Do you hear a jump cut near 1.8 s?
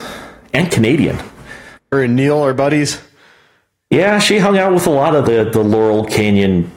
yes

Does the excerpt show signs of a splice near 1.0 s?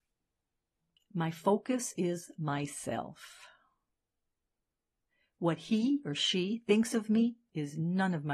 yes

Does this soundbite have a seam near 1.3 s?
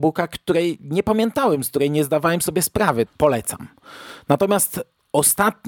no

